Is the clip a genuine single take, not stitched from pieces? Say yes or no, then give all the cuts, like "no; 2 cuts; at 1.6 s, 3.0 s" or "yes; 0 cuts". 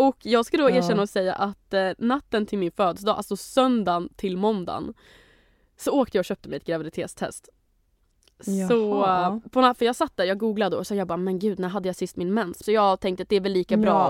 no; 1 cut; at 12.6 s